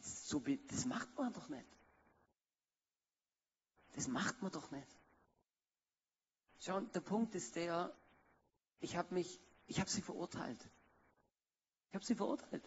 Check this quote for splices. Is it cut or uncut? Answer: uncut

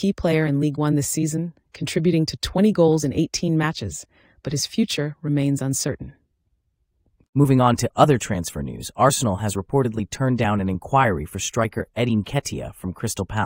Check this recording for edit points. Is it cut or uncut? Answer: uncut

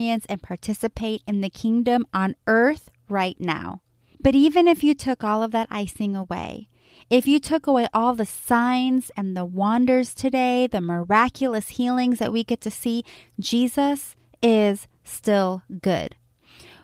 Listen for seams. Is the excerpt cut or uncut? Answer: uncut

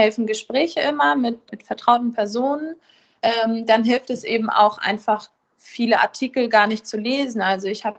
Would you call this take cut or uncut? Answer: cut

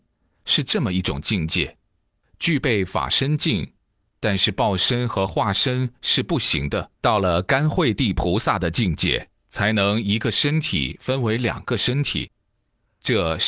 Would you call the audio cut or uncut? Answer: cut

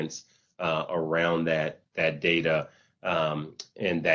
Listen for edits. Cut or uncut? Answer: uncut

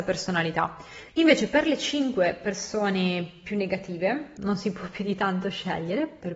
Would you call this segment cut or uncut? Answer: cut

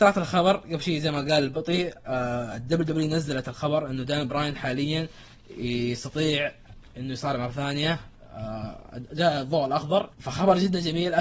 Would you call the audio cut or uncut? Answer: cut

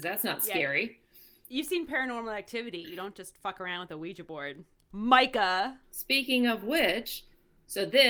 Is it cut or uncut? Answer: uncut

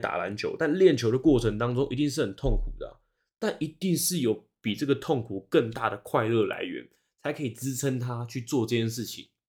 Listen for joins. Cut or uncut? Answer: uncut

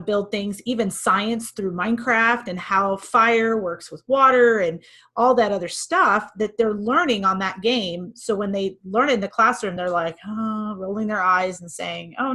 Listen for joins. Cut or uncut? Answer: uncut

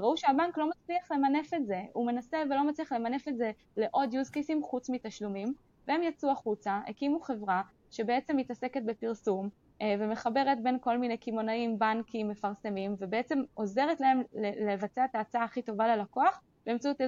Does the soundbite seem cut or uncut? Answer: uncut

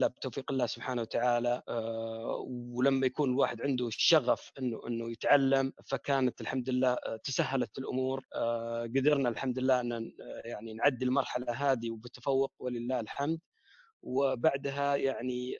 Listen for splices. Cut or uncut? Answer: uncut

